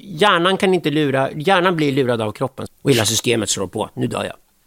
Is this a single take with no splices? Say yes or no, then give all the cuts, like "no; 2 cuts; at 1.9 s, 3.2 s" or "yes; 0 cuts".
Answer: no; 1 cut; at 2.7 s